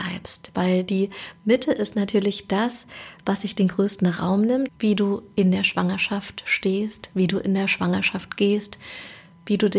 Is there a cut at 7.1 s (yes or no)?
no